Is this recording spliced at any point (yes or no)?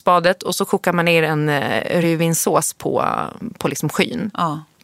no